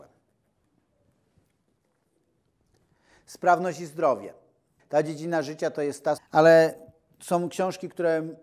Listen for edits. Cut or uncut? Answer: cut